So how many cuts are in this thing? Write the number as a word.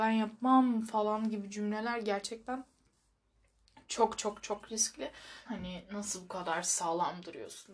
one